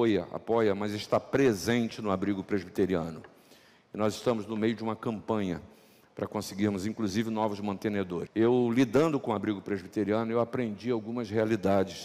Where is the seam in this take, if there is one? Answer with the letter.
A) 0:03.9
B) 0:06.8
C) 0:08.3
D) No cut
C